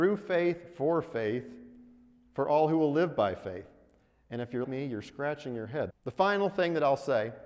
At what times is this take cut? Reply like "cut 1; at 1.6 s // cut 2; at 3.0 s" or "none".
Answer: cut 1; at 4.6 s // cut 2; at 5.9 s